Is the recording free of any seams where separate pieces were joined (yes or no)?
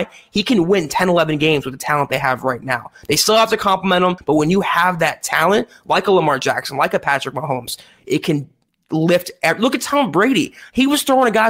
no